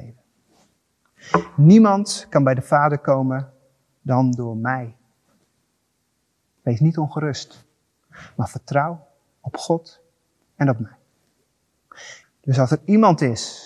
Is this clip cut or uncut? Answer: cut